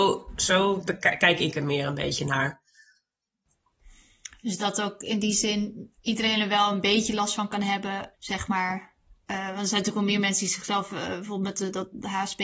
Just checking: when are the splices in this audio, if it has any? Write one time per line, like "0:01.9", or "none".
0:06.0
0:08.1